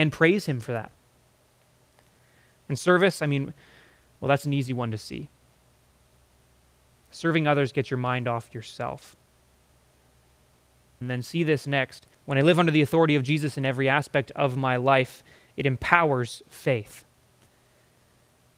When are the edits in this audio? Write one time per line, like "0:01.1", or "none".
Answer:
0:11.0
0:12.1

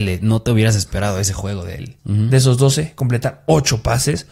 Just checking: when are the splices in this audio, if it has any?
0:02.0

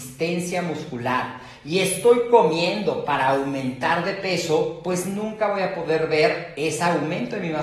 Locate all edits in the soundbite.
none

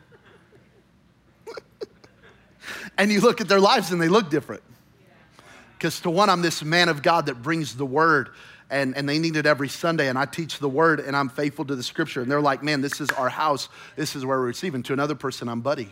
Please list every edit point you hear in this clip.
none

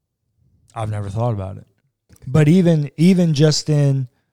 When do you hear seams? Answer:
0:02.1

